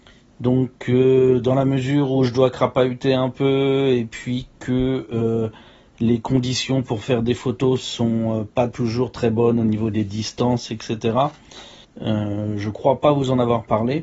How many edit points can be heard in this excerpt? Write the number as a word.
one